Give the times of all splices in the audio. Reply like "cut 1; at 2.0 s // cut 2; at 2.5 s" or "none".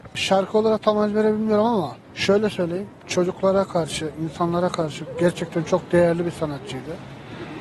cut 1; at 2.0 s